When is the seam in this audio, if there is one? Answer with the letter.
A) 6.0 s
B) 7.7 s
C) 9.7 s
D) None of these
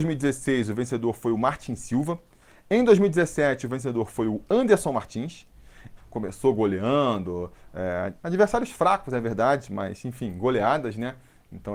A